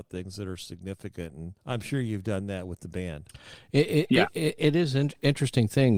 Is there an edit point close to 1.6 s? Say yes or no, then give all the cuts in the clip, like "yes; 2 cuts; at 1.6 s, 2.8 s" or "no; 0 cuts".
yes; 2 cuts; at 1.6 s, 4.6 s